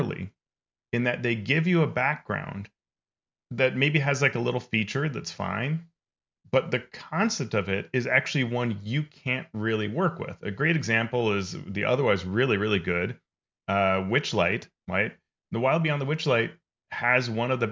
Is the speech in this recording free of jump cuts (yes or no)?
yes